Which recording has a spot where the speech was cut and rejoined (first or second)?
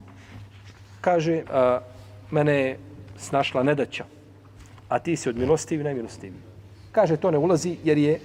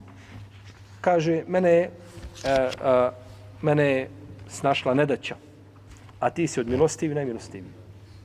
first